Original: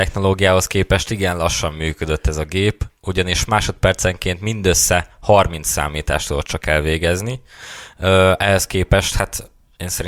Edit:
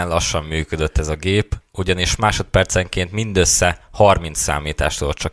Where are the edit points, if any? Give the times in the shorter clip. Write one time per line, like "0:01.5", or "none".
none